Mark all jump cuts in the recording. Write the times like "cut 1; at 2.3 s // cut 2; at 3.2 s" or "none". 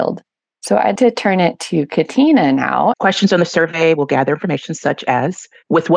cut 1; at 1.0 s // cut 2; at 2.9 s

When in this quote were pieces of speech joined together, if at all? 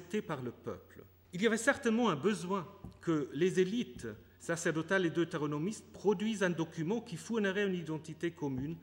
cut 1; at 1.2 s

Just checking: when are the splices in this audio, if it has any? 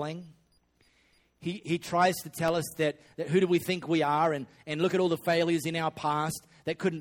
none

